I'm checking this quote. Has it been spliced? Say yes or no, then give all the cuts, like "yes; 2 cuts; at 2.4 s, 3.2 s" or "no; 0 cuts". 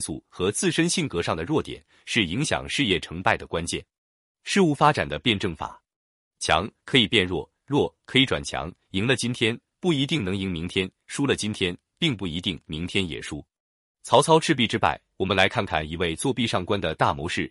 no; 0 cuts